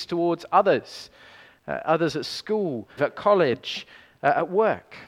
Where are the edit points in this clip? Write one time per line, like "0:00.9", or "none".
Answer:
0:03.0